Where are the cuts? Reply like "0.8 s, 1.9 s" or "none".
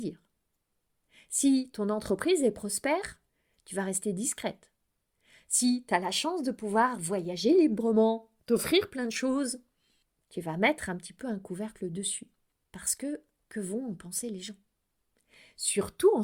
8.4 s